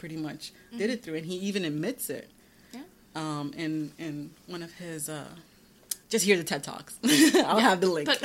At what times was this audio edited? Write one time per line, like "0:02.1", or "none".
0:06.0